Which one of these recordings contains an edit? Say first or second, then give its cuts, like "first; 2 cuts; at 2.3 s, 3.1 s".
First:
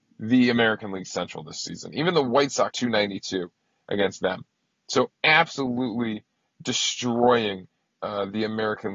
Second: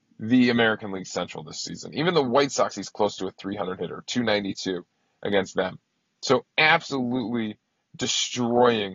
first; 1 cut; at 2.7 s